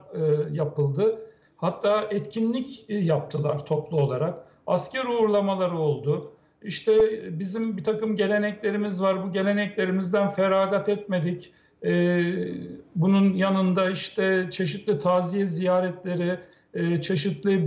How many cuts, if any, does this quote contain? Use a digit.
1